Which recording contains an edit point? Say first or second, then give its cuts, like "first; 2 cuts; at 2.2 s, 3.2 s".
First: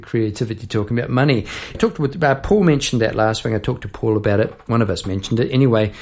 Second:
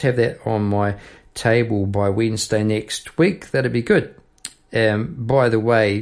first; 1 cut; at 1.7 s